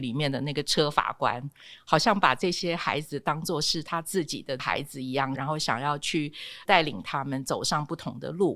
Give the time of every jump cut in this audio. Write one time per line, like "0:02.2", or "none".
0:05.3